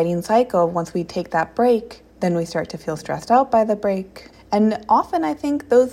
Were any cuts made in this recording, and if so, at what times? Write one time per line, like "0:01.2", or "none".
0:02.1
0:04.3